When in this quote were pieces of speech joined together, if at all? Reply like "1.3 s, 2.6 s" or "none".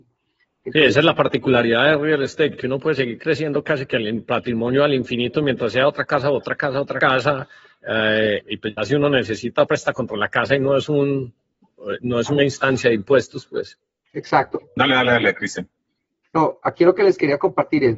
8.4 s, 9.7 s, 14.6 s